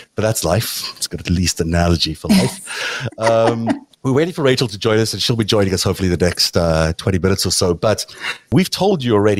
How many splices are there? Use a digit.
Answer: 1